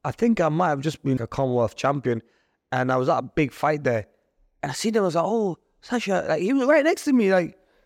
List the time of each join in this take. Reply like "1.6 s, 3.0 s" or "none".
1.2 s